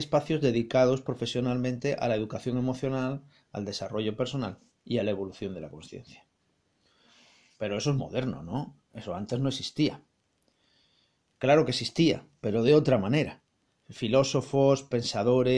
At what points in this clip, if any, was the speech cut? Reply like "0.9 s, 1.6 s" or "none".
8.0 s